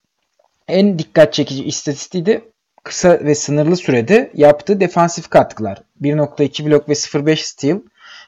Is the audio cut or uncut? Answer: uncut